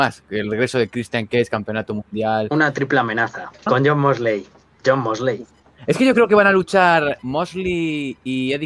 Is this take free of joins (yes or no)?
no